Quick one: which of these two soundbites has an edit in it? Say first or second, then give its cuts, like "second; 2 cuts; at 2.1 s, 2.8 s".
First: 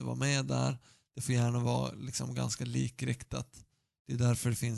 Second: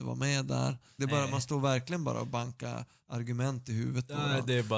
second; 1 cut; at 1.0 s